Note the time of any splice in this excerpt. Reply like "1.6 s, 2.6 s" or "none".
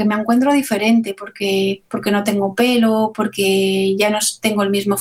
1.9 s

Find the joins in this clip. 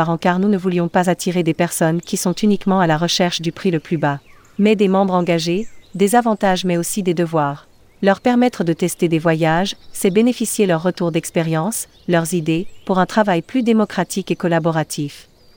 5.8 s

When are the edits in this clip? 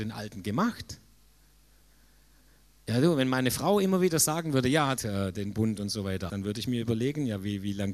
5.0 s, 6.3 s

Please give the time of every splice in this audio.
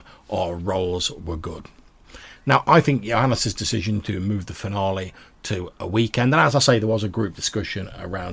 none

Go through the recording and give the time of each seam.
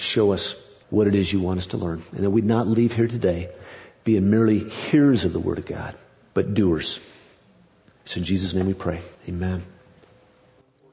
none

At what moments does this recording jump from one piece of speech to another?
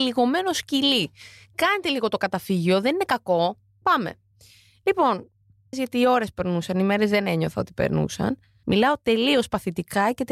5.7 s, 8.6 s

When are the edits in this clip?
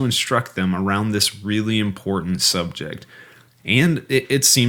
none

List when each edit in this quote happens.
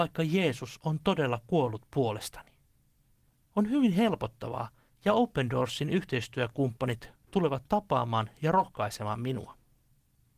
4.9 s

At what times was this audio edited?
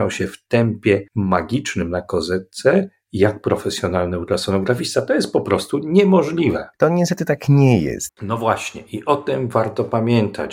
6.7 s, 8.1 s

